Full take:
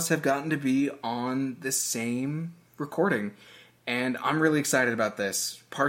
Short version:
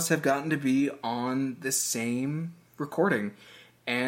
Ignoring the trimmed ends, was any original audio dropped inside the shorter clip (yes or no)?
no